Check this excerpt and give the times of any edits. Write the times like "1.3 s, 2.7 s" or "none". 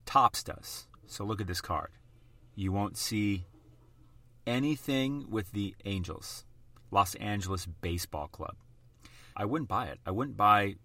9.3 s